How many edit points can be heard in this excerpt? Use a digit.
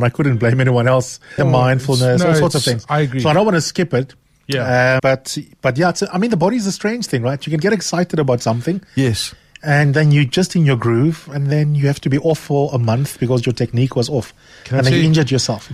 2